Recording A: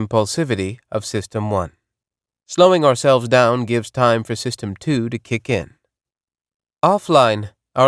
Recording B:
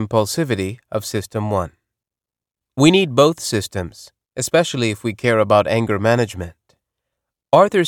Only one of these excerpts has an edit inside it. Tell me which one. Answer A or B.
A